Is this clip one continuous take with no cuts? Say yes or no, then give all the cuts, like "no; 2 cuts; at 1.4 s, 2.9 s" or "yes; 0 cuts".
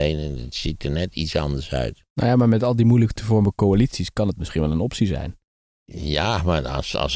yes; 0 cuts